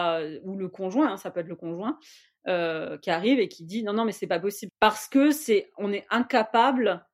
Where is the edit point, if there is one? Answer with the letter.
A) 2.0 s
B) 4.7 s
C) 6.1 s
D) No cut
B